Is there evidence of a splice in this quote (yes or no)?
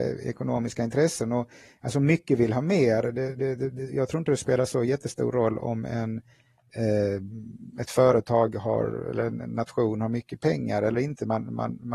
no